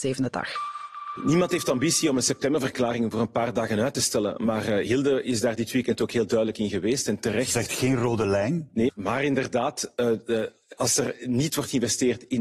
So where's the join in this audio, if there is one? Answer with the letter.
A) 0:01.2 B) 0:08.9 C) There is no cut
B